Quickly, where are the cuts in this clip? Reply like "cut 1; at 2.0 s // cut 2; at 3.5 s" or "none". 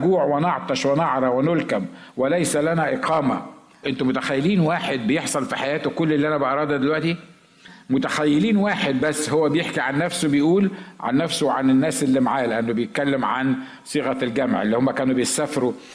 cut 1; at 3.8 s